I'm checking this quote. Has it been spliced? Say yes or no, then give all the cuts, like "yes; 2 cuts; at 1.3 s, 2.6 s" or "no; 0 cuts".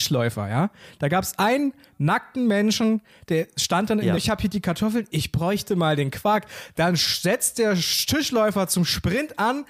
yes; 1 cut; at 4.2 s